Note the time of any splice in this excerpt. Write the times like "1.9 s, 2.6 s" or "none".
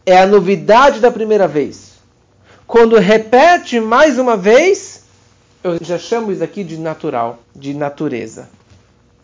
5.8 s, 7.4 s